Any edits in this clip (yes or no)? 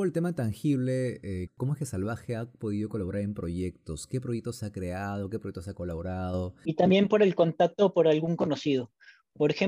yes